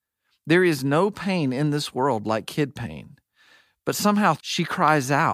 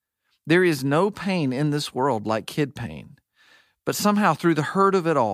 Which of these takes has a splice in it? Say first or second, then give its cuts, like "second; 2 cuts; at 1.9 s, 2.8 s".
first; 1 cut; at 4.4 s